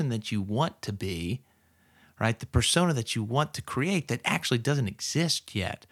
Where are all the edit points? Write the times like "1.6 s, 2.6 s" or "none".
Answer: none